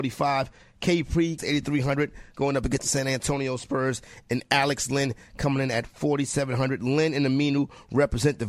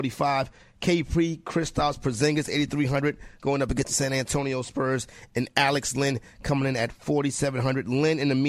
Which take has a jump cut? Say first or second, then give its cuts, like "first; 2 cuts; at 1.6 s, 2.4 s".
first; 1 cut; at 1.4 s